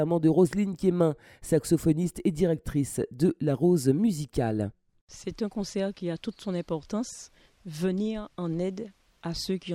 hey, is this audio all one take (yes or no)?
yes